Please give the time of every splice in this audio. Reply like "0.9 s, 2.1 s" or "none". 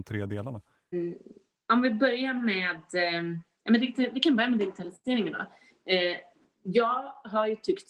0.9 s